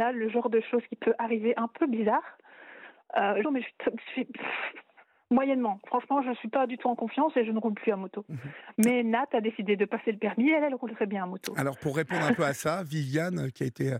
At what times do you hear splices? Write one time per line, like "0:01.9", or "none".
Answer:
0:03.4